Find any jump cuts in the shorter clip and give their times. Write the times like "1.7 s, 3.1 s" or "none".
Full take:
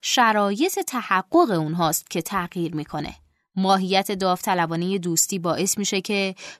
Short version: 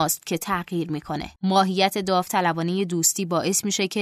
1.4 s